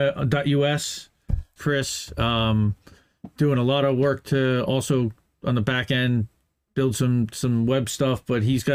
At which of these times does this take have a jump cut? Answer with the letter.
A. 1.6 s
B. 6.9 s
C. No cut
A